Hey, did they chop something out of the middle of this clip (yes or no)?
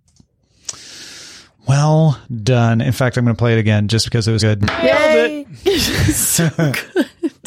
yes